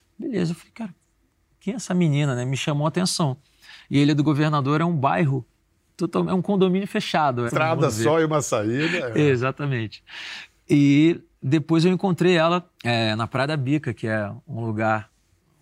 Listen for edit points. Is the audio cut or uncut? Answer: cut